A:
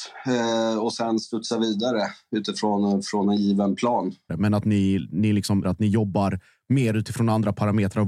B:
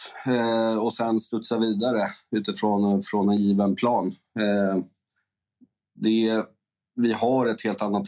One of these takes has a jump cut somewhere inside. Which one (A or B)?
A